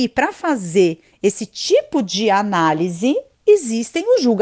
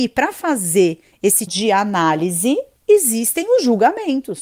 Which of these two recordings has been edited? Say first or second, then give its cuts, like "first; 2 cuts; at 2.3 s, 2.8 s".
second; 1 cut; at 1.5 s